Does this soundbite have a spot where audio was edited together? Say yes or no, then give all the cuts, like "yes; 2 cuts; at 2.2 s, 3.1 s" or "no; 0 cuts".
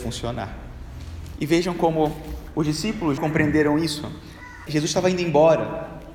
yes; 3 cuts; at 1.4 s, 3.2 s, 4.7 s